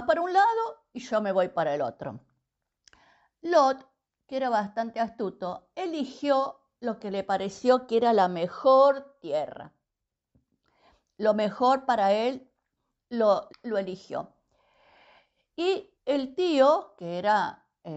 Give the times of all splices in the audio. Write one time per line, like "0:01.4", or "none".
0:13.5
0:15.9